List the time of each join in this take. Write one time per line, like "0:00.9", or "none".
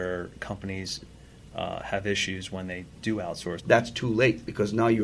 0:03.6